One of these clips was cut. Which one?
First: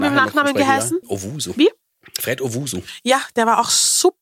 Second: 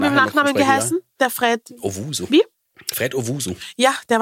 first; 1 cut; at 1.0 s

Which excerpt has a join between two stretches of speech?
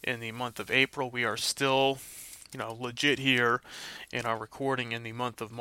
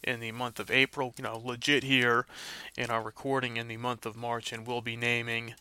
second; 1 cut; at 1.1 s

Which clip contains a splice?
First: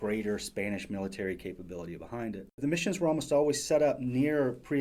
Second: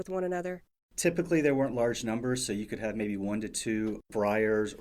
first; 1 cut; at 2.6 s

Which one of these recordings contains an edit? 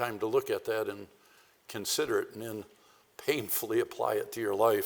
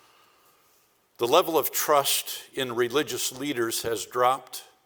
second; 1 cut; at 1.0 s

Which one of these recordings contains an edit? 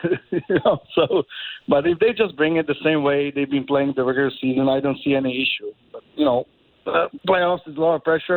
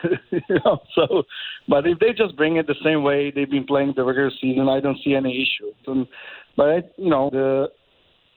second; 2 cuts; at 5.8 s, 7.3 s

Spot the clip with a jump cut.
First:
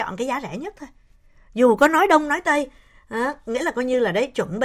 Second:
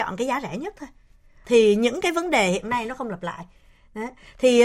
second; 1 cut; at 1.4 s

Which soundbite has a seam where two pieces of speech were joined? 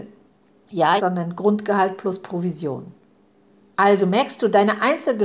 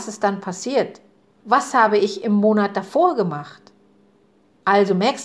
first; 2 cuts; at 1.0 s, 3.7 s

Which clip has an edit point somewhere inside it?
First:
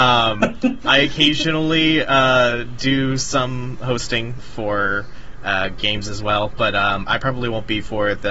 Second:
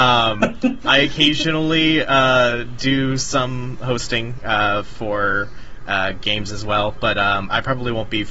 first; 1 cut; at 4.4 s

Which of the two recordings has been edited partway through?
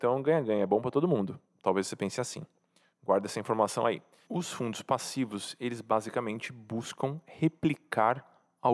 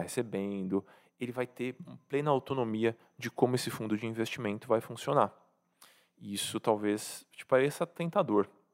first; 1 cut; at 4.2 s

